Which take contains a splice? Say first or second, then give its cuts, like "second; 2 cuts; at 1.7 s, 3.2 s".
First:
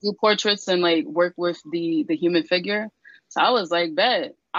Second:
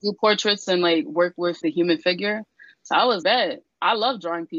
second; 2 cuts; at 1.6 s, 3.2 s